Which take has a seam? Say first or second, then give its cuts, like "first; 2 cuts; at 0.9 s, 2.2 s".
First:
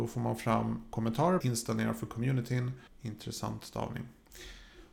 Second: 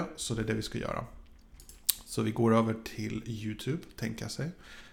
first; 2 cuts; at 1.4 s, 2.9 s